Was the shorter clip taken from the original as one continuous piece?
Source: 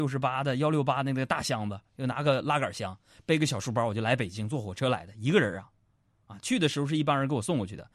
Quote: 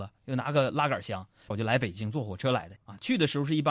no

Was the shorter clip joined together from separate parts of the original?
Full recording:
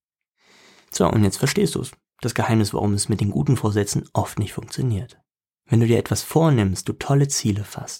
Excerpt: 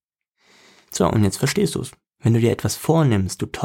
yes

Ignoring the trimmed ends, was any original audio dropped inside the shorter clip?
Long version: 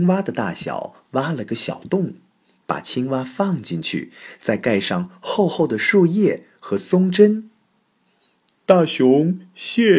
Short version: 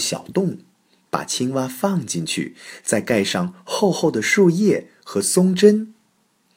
no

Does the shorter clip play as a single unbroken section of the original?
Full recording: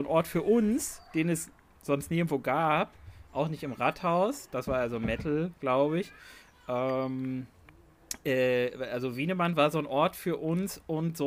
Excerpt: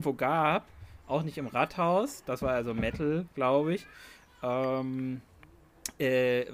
yes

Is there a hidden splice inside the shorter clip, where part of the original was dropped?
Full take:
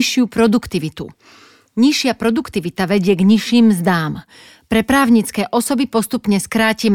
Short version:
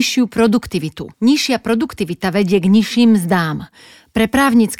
yes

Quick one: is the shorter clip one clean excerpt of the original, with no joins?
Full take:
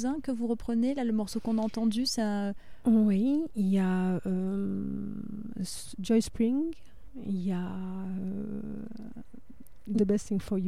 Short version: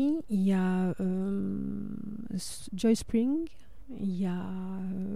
yes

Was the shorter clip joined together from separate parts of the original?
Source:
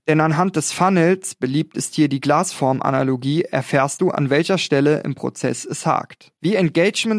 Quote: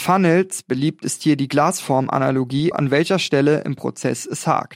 yes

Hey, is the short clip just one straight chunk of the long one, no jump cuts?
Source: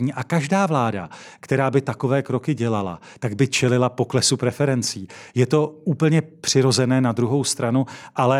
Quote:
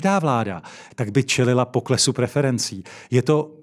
no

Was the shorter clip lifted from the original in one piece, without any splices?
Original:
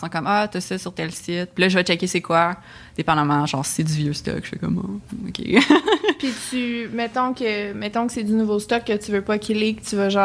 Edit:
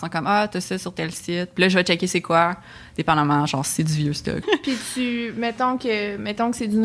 no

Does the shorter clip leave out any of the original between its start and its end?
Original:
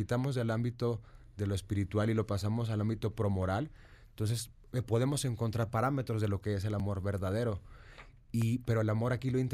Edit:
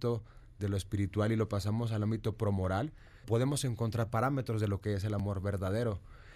yes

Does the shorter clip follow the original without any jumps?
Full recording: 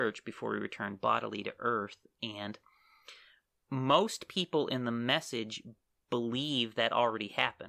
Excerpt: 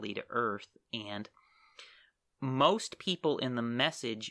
yes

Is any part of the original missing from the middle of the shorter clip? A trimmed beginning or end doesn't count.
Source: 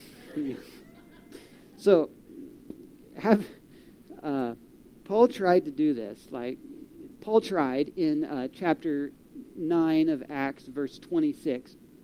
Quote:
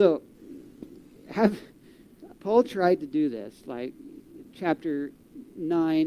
yes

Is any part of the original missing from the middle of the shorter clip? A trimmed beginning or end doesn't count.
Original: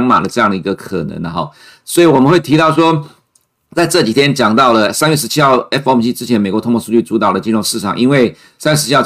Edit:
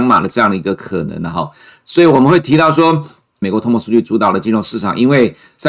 yes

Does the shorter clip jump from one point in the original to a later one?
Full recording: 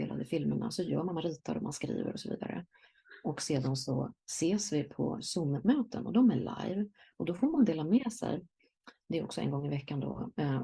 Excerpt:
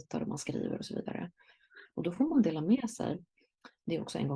yes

